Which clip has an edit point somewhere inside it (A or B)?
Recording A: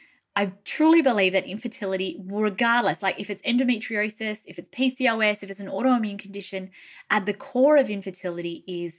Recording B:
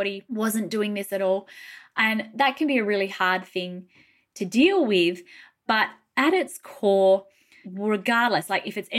B